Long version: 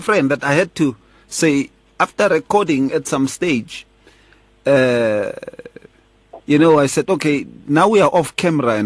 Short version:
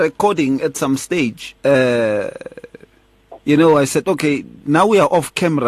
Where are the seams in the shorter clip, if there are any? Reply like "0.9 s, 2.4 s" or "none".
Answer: 1.6 s